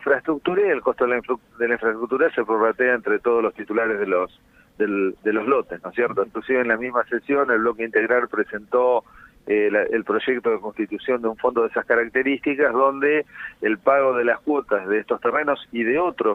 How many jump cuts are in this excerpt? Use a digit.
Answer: 1